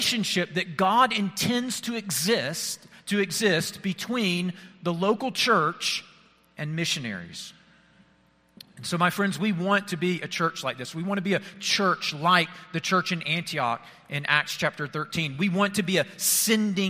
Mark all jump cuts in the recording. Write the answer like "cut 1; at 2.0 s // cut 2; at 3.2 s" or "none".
none